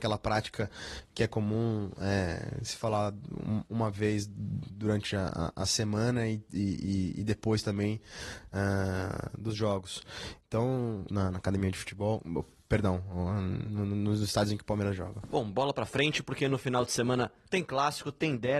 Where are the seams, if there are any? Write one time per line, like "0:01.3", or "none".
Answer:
0:11.1